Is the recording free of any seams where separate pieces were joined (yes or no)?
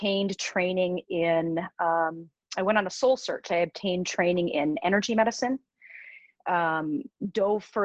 yes